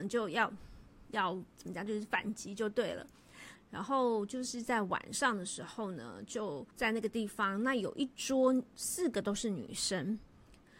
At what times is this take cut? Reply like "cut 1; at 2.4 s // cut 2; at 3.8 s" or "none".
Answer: cut 1; at 1.9 s // cut 2; at 3.6 s // cut 3; at 6.7 s